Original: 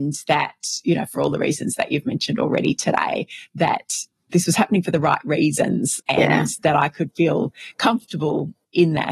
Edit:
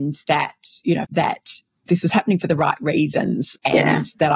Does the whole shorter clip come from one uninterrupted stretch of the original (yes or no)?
no